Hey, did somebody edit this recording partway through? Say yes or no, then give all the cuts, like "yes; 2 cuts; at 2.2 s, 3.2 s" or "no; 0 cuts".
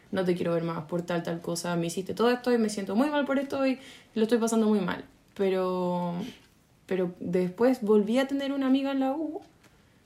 no; 0 cuts